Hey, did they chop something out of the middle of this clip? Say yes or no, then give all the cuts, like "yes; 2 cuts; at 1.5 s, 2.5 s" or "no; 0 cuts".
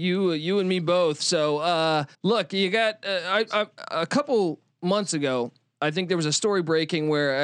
yes; 1 cut; at 2.1 s